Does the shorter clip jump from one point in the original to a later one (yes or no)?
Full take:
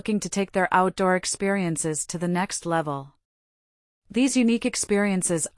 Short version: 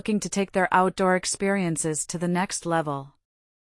no